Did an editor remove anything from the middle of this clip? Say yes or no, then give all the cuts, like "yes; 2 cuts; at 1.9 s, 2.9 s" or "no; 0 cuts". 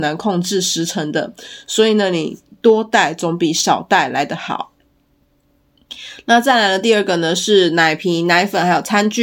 no; 0 cuts